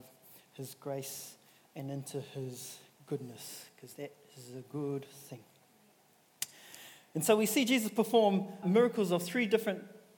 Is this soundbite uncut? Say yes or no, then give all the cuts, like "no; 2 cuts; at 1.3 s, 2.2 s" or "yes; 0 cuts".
no; 1 cut; at 8.6 s